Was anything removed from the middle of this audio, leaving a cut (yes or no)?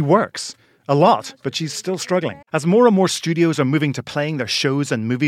yes